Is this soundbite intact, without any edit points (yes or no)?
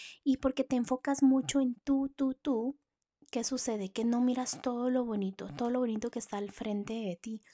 yes